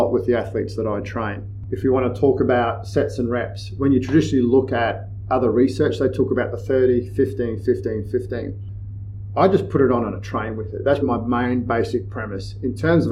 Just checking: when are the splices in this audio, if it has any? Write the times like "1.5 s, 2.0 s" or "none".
11.0 s